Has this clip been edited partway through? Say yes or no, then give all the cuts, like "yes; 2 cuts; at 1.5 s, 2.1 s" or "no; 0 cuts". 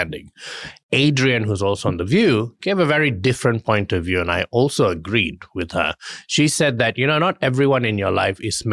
no; 0 cuts